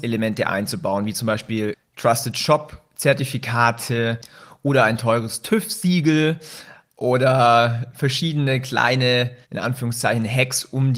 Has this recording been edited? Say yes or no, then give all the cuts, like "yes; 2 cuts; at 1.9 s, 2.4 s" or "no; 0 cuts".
yes; 1 cut; at 9.4 s